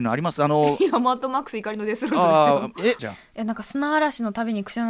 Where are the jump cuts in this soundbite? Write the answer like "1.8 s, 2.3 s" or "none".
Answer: 3.0 s

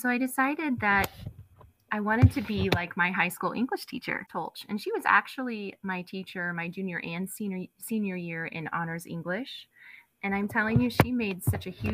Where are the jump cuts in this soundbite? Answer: 4.3 s

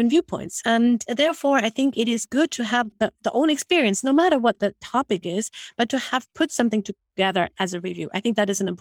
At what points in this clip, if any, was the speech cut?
none

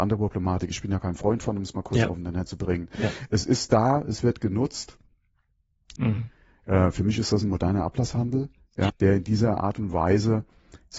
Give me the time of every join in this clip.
6.0 s, 8.9 s

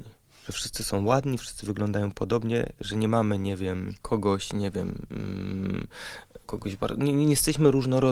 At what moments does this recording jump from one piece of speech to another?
4.0 s, 6.4 s

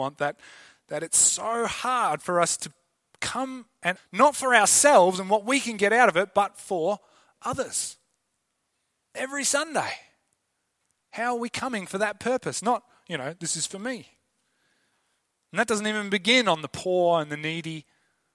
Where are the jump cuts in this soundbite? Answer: 4.0 s

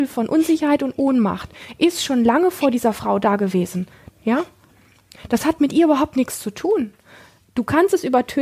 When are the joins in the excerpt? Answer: 4.1 s

